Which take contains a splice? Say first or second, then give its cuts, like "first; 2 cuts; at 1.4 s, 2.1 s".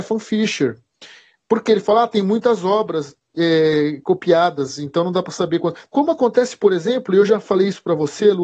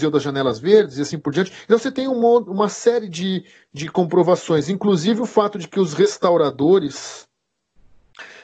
first; 1 cut; at 5.9 s